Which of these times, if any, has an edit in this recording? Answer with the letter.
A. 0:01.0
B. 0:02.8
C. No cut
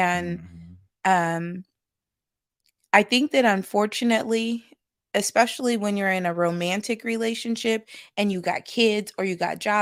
C